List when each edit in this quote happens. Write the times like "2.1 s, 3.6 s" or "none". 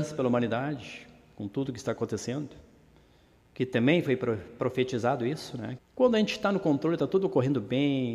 5.8 s